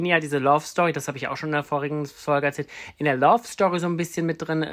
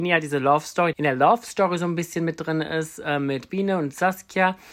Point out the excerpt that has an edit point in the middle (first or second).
second